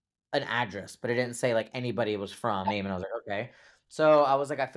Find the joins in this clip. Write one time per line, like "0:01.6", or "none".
0:02.6